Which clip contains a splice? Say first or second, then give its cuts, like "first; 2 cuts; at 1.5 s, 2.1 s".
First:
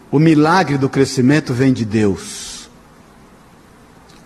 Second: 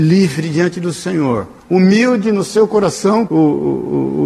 second; 2 cuts; at 1.6 s, 3.3 s